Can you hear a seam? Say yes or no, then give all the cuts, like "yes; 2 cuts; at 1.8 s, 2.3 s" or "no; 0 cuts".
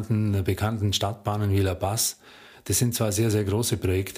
no; 0 cuts